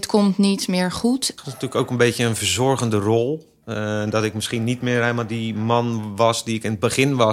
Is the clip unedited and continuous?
no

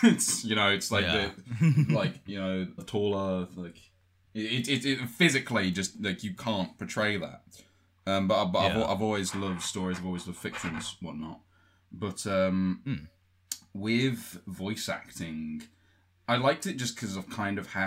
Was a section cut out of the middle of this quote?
yes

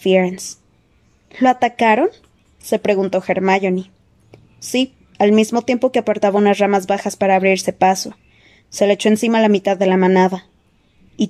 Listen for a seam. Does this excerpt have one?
yes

